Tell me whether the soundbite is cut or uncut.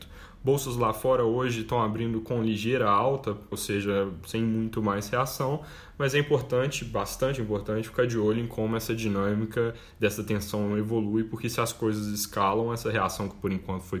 cut